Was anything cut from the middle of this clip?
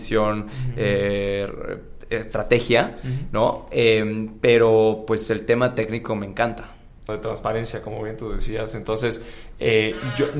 yes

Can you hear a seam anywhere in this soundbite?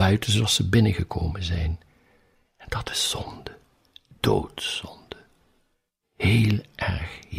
no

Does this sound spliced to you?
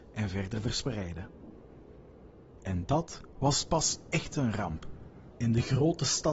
yes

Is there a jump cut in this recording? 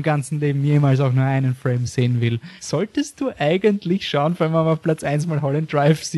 yes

